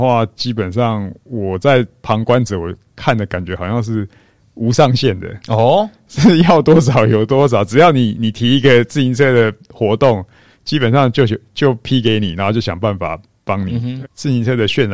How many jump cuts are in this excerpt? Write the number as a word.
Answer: one